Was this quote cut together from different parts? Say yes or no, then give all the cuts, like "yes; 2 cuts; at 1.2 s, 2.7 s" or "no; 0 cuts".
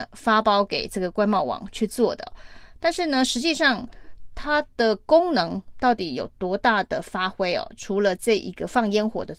no; 0 cuts